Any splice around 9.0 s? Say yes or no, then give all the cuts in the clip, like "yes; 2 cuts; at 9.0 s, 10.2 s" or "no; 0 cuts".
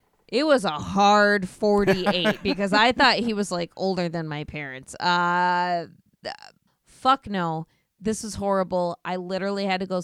no; 1 cut; at 6.7 s